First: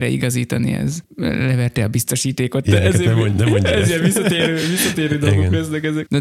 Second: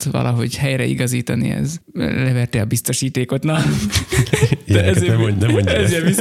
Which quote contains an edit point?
first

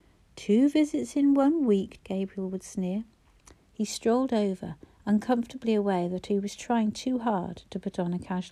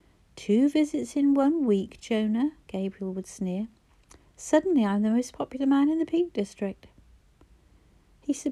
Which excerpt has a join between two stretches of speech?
first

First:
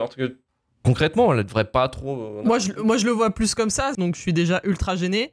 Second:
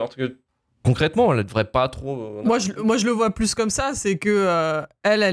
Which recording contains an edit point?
first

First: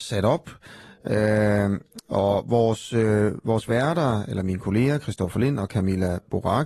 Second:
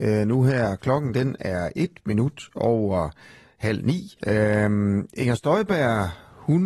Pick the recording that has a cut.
second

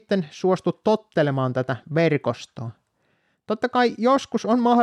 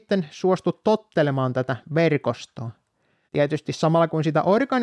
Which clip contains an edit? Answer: second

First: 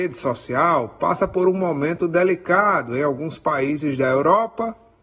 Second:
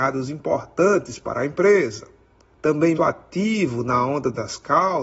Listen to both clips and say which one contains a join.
second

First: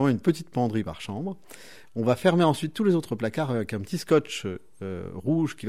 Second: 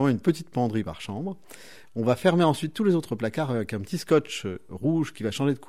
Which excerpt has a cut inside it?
second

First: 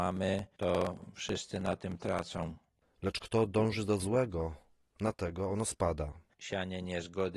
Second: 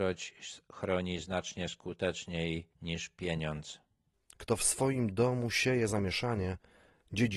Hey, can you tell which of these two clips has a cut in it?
first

